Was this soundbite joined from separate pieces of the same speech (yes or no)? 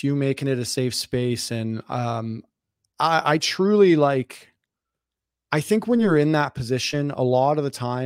no